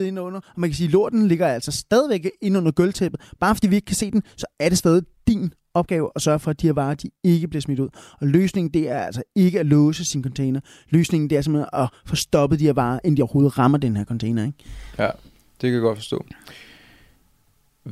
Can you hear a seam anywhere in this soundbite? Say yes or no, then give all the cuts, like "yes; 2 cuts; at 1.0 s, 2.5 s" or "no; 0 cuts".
no; 0 cuts